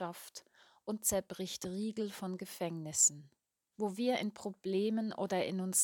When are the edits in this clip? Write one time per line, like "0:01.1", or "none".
0:03.7